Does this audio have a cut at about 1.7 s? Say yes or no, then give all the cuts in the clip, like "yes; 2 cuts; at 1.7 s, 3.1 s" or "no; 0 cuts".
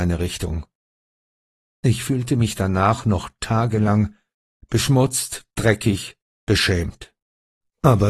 yes; 1 cut; at 1.7 s